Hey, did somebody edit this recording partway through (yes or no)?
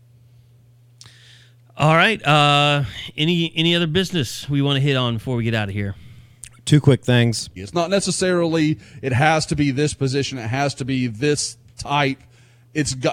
yes